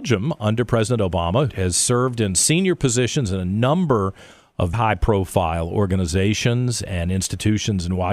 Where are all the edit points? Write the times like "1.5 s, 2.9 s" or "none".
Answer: 1.5 s, 4.7 s